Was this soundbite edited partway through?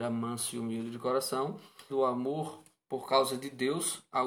yes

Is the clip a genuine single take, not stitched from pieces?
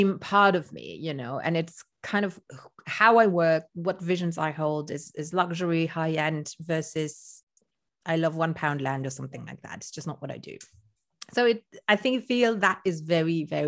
yes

